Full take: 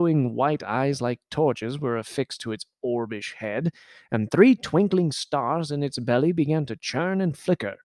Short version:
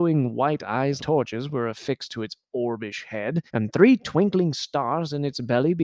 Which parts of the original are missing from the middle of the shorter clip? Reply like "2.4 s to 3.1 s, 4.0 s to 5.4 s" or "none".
1.0 s to 1.3 s, 3.8 s to 4.1 s